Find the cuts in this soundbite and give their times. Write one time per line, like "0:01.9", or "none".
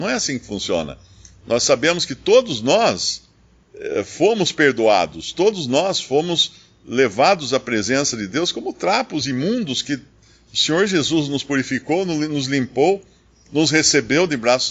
none